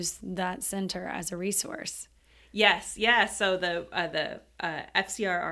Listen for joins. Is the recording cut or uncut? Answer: uncut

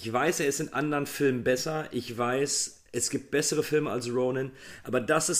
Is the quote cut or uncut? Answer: uncut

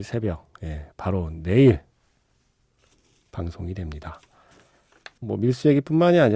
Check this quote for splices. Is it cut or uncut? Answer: cut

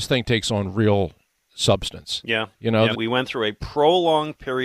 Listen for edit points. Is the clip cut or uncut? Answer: cut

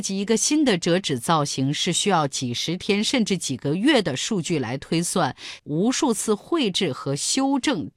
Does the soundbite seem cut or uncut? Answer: cut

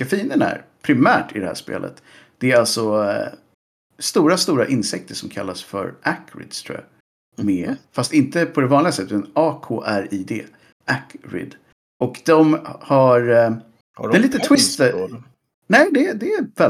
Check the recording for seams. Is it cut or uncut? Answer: uncut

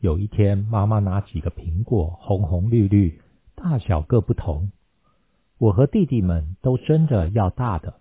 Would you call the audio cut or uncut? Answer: uncut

